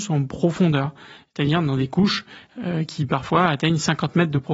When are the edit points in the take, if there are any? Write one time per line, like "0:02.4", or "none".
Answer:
none

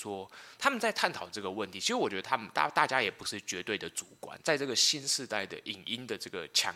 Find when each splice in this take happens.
0:04.4

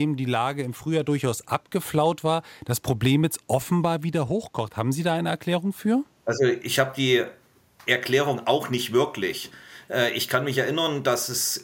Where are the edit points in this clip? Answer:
none

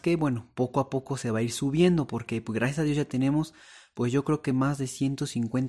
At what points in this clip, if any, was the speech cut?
none

